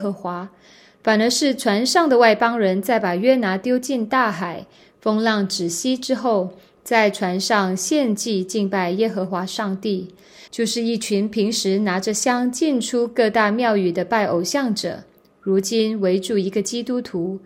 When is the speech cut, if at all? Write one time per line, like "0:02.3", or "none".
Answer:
0:10.5